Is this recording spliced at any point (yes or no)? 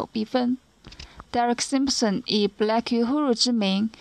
no